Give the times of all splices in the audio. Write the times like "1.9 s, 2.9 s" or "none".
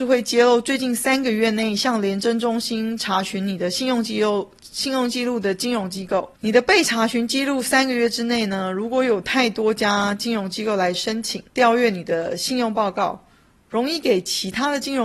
6.4 s, 11.5 s

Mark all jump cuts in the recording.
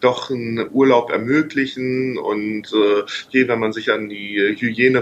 3.3 s

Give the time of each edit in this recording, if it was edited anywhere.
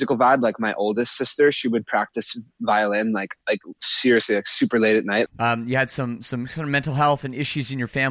3.4 s, 5.3 s

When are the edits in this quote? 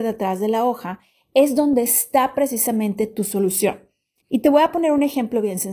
4.2 s

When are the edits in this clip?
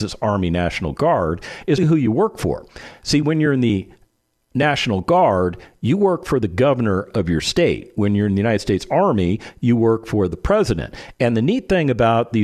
1.8 s

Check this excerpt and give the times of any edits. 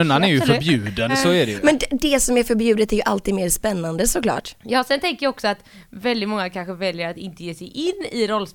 1.1 s

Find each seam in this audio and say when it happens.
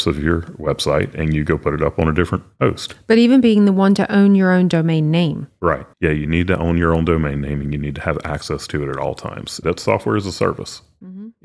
5.9 s, 9.6 s

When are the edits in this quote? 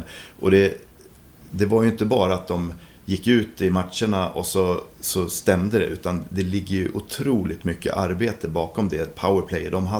4.9 s

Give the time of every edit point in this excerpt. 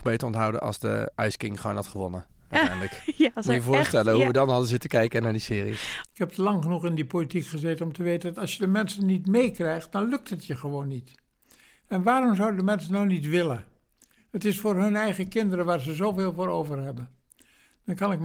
6.0 s

